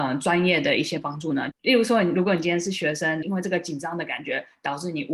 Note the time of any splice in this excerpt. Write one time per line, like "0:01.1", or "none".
0:01.5
0:03.2